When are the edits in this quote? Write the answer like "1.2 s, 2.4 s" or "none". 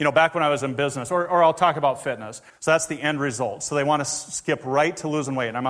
2.5 s